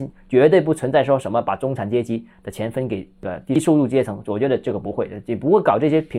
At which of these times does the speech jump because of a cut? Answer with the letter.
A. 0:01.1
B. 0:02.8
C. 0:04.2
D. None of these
D